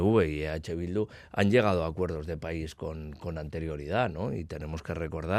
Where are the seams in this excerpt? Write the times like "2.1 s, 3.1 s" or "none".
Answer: none